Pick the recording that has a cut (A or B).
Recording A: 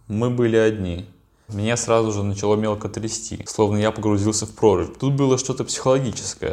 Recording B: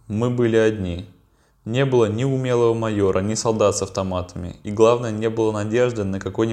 A